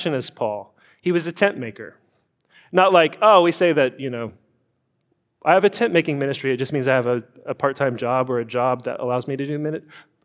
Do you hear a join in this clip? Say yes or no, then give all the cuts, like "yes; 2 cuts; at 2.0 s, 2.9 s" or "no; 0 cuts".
no; 0 cuts